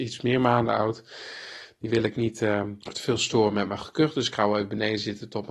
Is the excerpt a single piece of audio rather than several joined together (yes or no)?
no